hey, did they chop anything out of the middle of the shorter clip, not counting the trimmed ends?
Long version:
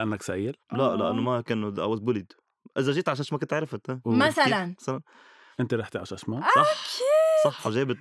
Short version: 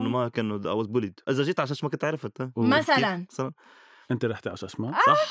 yes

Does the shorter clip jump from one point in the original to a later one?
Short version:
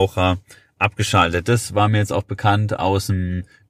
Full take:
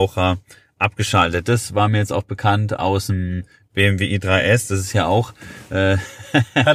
no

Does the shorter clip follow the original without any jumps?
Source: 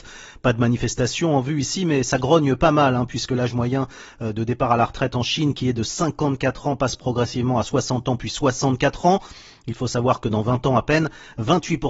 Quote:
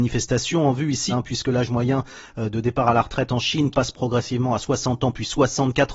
no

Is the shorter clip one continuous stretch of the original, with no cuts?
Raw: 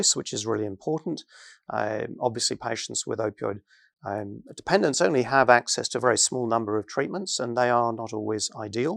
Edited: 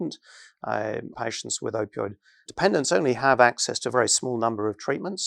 no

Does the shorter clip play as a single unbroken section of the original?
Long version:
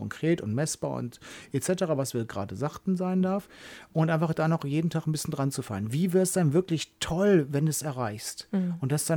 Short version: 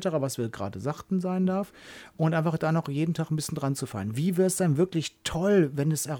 yes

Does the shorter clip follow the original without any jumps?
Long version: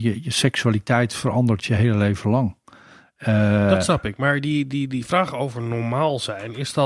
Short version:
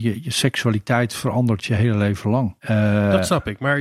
no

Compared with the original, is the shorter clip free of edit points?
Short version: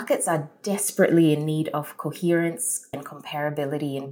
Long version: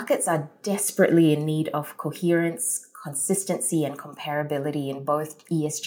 no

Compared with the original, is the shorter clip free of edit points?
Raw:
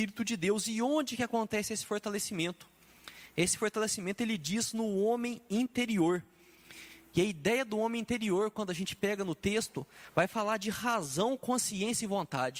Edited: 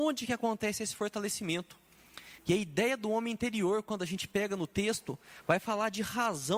no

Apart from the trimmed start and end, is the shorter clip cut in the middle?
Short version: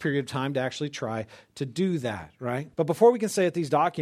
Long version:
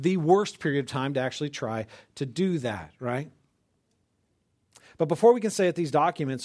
yes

